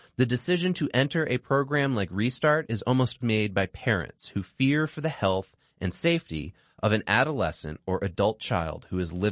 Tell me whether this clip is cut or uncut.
cut